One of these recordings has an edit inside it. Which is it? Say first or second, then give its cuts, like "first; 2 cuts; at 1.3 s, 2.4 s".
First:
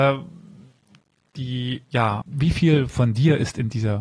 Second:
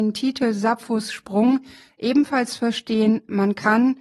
first; 1 cut; at 2.2 s